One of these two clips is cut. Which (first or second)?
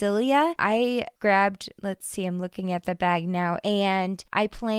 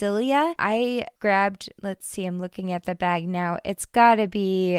first